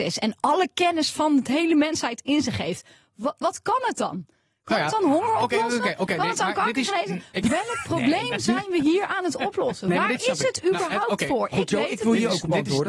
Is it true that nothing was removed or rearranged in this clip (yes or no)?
yes